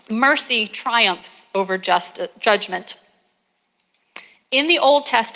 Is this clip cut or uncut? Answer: uncut